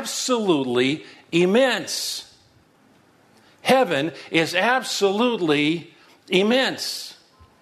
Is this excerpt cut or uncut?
uncut